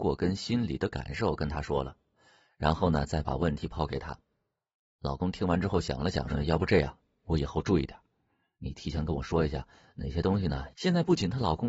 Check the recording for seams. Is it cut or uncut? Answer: cut